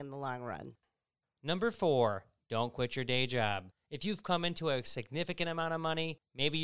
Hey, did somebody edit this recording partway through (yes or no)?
no